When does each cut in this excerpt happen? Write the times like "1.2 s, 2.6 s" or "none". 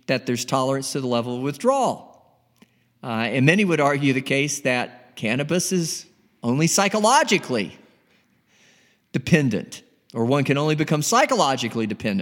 none